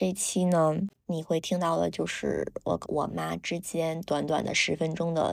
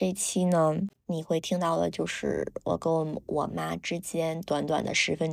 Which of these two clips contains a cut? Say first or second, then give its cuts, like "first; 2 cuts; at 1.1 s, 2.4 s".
first; 1 cut; at 2.8 s